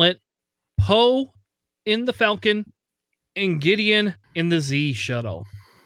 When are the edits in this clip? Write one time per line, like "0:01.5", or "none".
0:04.2